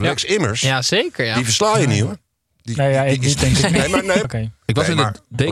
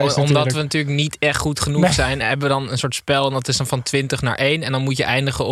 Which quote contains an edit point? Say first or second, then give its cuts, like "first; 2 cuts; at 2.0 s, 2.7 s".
first; 1 cut; at 4.2 s